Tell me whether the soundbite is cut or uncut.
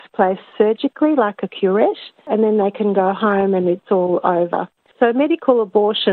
cut